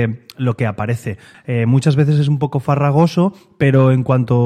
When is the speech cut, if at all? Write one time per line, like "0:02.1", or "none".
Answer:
0:01.3